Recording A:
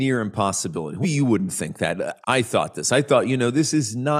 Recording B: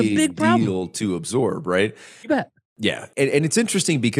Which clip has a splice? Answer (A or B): A